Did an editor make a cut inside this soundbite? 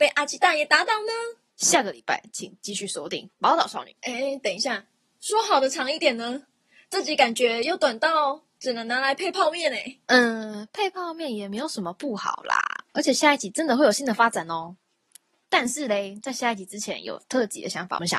no; 0 cuts

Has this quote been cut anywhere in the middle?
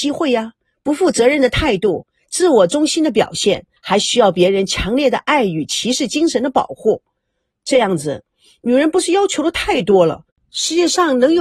yes; 1 cut; at 3.8 s

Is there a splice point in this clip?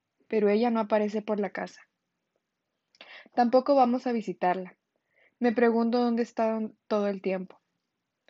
no; 0 cuts

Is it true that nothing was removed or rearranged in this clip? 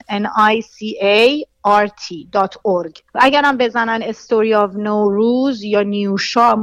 no; 1 cut; at 3.1 s

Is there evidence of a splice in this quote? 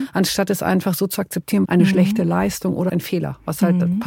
yes; 2 cuts; at 1.6 s, 2.9 s

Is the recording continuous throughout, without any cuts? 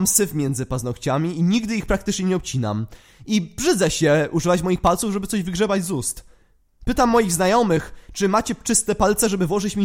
yes; 0 cuts

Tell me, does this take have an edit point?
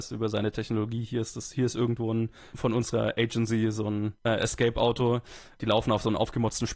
no; 0 cuts

